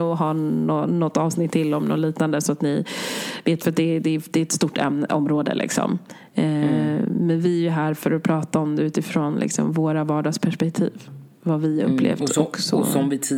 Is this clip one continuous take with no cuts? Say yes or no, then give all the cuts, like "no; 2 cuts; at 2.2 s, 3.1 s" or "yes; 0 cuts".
yes; 0 cuts